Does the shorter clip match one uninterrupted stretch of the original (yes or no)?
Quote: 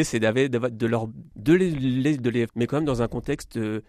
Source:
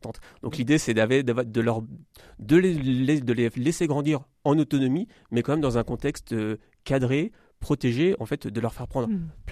no